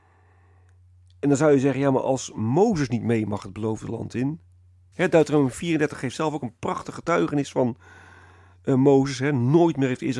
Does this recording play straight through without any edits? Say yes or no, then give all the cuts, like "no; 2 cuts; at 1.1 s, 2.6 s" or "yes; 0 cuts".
no; 1 cut; at 4.9 s